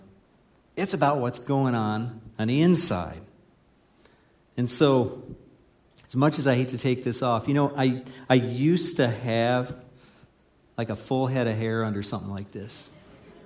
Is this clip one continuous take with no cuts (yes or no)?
yes